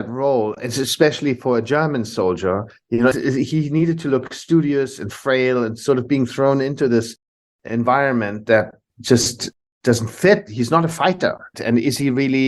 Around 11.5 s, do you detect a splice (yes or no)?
yes